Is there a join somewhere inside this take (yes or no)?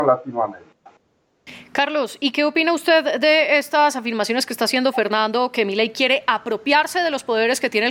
no